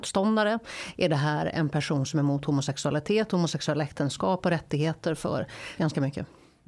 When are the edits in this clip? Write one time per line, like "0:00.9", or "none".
0:05.8